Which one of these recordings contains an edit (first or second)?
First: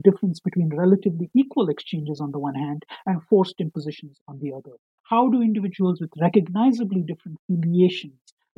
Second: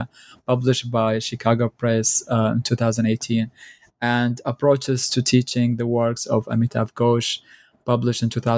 first